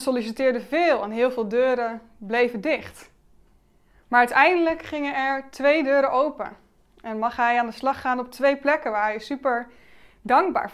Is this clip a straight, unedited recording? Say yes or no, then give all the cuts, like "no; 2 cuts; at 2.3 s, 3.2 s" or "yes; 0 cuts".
yes; 0 cuts